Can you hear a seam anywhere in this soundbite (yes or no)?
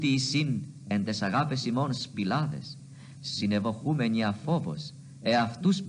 no